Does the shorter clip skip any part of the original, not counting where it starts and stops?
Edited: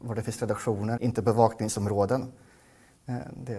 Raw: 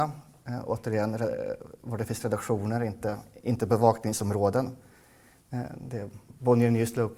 yes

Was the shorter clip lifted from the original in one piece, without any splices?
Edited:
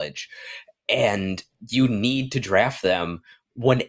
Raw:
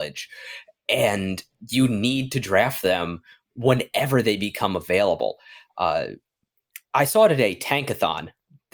yes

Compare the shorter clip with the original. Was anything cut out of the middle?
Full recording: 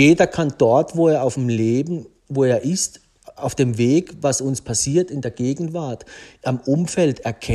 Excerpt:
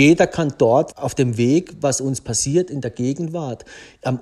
yes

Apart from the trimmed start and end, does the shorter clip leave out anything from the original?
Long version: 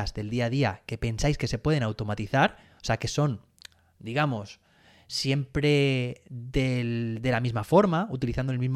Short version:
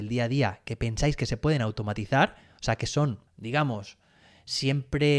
yes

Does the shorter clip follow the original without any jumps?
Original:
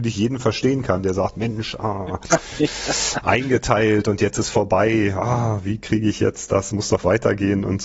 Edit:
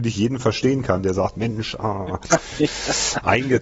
yes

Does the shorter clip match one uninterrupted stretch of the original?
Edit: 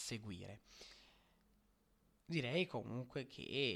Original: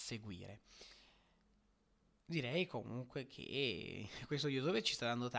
yes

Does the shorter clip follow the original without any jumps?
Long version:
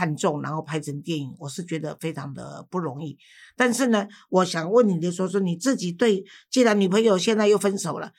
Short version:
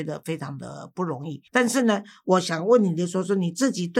no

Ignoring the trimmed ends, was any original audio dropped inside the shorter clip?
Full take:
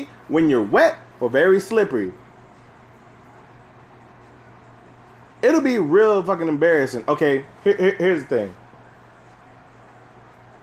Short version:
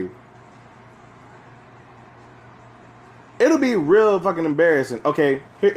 no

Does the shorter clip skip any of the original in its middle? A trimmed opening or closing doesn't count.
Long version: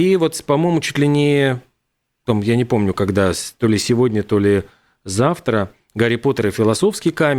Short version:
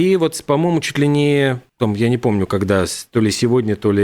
yes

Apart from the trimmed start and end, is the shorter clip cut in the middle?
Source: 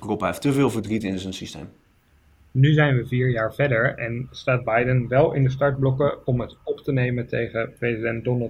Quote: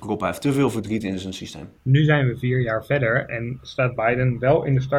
yes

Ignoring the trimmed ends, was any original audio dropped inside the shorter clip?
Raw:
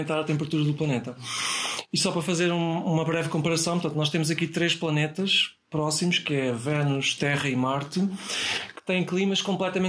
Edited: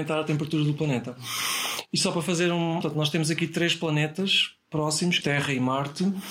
yes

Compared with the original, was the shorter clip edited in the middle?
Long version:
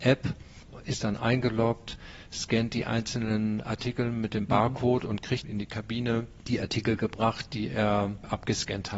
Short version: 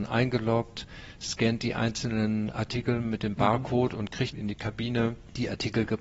no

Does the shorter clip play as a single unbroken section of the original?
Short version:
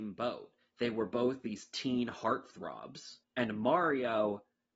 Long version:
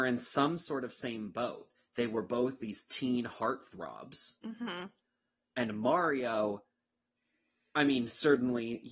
no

